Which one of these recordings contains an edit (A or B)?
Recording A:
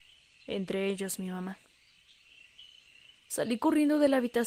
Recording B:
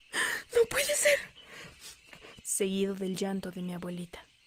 B